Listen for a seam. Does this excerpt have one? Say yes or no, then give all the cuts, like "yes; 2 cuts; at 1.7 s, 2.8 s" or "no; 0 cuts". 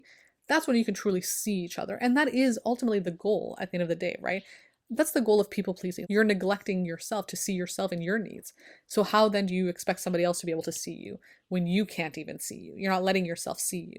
yes; 1 cut; at 6.0 s